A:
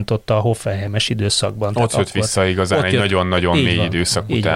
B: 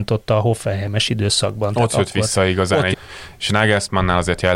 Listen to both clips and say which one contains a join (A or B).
B